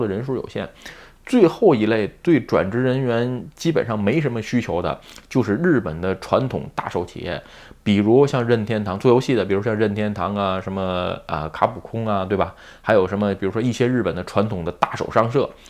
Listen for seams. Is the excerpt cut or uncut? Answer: uncut